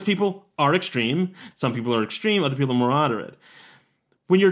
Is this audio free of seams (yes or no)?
no